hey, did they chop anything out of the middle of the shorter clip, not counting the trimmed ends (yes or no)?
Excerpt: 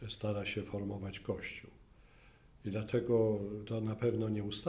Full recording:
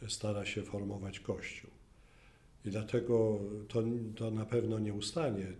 yes